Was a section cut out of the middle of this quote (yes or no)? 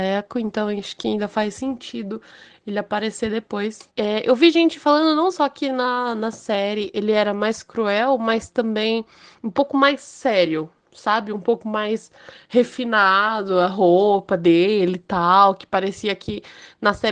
yes